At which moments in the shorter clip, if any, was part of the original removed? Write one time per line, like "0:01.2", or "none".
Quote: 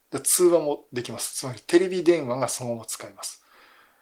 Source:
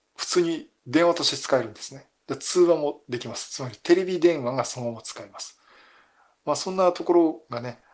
none